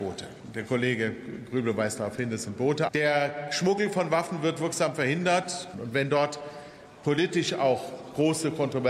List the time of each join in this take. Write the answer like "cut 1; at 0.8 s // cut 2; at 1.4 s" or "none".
cut 1; at 2.9 s // cut 2; at 5.7 s